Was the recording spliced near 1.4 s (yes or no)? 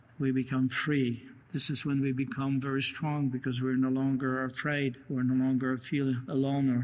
yes